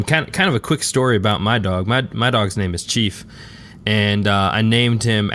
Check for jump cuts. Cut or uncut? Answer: uncut